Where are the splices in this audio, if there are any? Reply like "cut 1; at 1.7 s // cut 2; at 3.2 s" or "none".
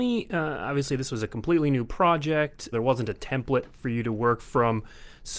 cut 1; at 2.7 s